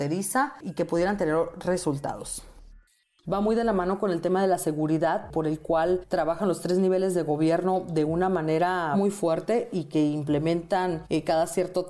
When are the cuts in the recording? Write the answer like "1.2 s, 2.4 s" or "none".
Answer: 3.2 s